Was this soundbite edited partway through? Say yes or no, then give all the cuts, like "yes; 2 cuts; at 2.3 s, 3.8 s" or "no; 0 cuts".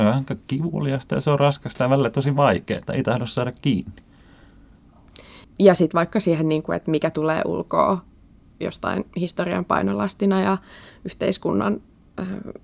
yes; 1 cut; at 5.4 s